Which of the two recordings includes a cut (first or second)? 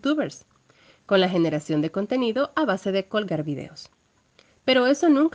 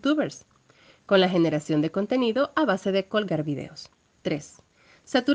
second